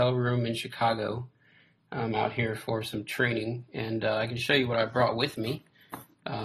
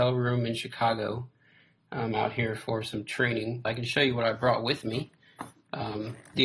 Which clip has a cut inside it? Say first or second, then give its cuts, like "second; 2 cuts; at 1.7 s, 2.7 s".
second; 1 cut; at 3.6 s